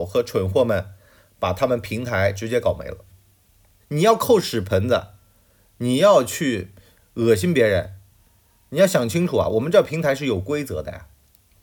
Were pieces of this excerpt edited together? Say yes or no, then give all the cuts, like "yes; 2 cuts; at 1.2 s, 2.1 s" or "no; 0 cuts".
yes; 1 cut; at 3.8 s